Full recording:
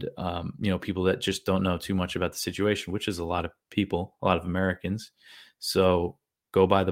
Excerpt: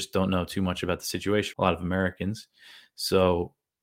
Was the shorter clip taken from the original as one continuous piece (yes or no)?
no